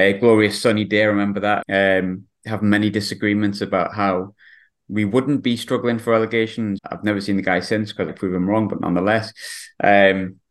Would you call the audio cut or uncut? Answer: cut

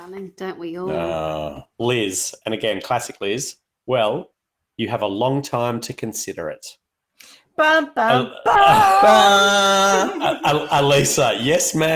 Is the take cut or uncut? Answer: uncut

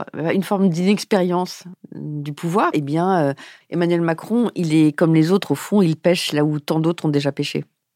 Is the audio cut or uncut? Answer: cut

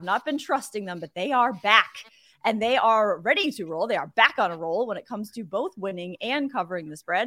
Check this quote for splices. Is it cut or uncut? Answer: uncut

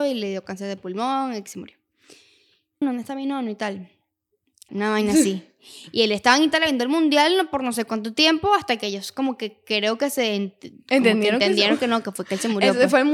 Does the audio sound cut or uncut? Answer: cut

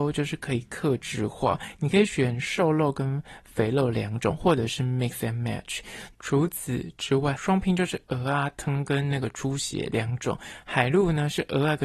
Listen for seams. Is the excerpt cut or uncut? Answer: cut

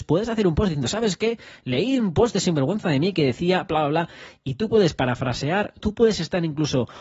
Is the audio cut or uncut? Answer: cut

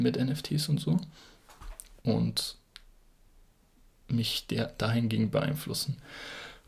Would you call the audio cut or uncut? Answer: cut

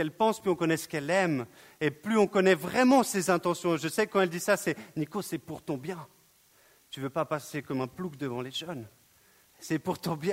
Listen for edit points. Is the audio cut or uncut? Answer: uncut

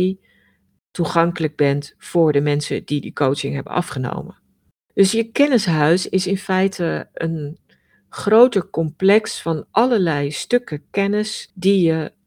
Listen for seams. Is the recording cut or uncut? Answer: uncut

